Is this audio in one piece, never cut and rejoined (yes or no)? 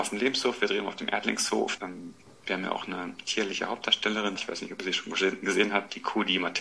no